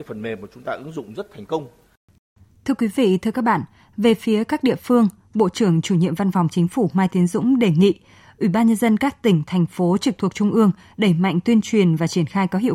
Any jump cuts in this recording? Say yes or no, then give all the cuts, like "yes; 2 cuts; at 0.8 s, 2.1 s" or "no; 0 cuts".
no; 0 cuts